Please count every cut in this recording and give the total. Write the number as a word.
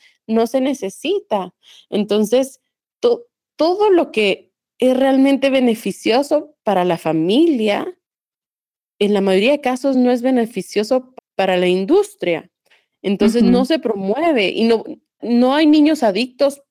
two